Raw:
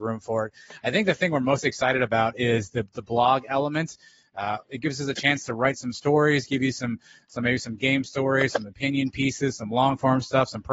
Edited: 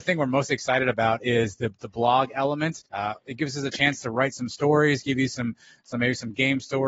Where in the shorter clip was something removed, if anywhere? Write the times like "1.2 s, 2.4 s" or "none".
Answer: 2.9 s